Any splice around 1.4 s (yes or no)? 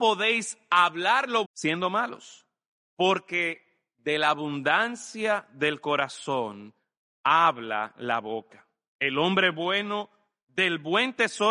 yes